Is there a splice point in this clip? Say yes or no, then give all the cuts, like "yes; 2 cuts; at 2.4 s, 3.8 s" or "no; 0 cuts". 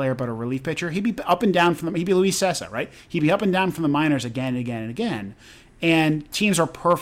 no; 0 cuts